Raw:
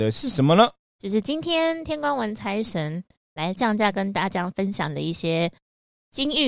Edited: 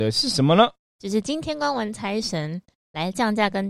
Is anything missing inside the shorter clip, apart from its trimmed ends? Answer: yes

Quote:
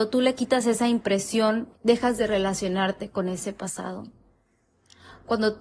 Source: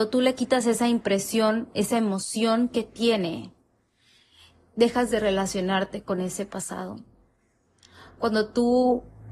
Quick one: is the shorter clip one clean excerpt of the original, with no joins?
no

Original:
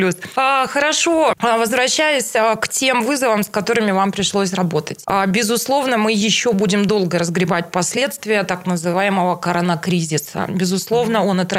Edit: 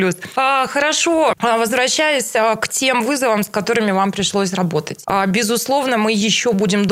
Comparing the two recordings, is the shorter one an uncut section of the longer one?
yes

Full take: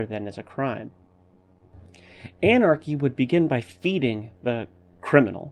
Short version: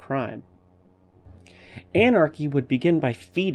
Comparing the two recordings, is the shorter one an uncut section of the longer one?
yes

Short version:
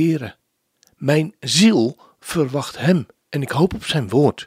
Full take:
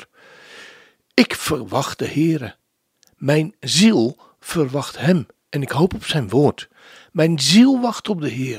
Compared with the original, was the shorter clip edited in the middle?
no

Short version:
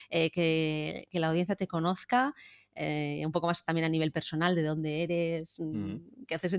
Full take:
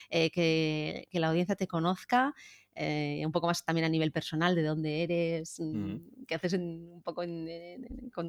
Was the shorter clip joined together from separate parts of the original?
no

